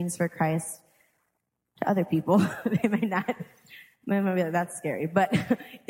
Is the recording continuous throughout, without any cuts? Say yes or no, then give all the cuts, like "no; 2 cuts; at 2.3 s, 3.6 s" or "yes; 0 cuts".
yes; 0 cuts